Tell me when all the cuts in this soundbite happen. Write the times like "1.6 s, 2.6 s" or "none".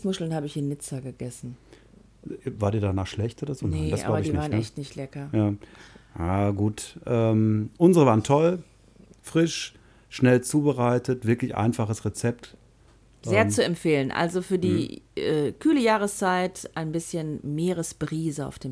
none